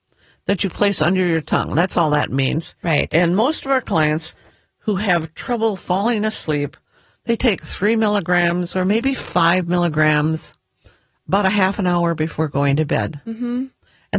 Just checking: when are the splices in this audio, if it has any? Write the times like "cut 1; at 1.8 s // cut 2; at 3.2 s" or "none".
none

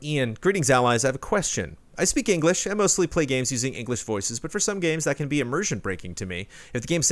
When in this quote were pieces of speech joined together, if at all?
cut 1; at 1.9 s

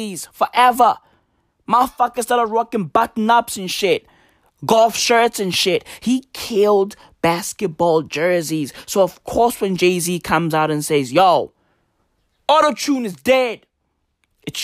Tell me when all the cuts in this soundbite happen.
none

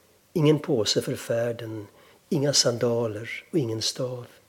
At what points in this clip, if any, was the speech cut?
cut 1; at 2.1 s

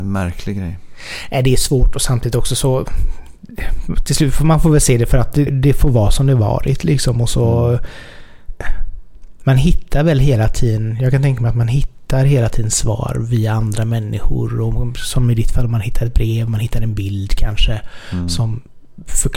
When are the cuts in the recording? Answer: cut 1; at 5.5 s

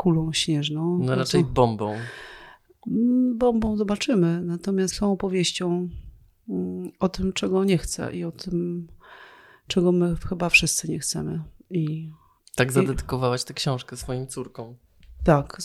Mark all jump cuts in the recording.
cut 1; at 4.9 s

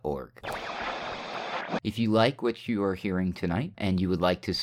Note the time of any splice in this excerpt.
cut 1; at 1.8 s

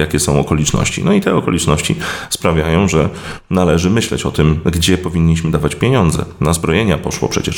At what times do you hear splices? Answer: none

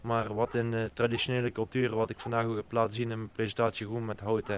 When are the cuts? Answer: none

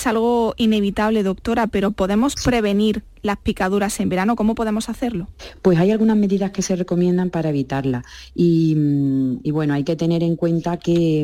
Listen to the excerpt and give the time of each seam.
none

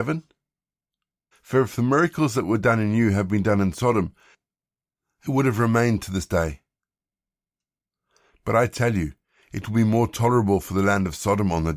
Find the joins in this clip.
cut 1; at 1.3 s

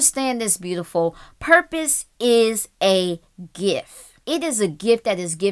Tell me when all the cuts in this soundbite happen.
cut 1; at 4.2 s

